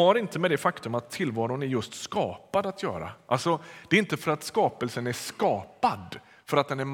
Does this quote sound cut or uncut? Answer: uncut